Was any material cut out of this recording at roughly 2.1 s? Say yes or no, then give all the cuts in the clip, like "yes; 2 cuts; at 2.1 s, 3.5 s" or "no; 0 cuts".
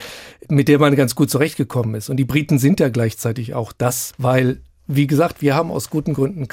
no; 1 cut; at 4.1 s